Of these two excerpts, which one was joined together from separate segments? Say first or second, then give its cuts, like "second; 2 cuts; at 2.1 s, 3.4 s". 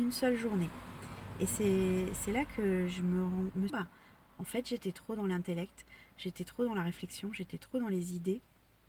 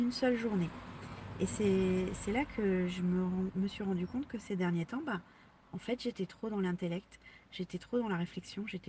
first; 1 cut; at 3.7 s